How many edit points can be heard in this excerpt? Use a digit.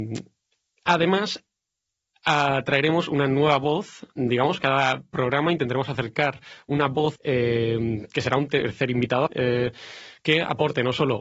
2